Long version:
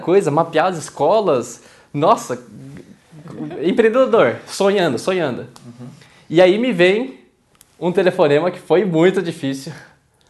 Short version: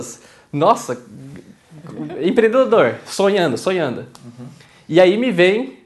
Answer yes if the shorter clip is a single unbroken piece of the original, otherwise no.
yes